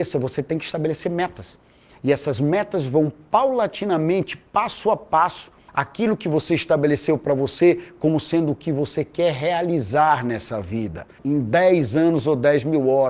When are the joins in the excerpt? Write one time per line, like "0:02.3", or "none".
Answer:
0:05.7
0:11.2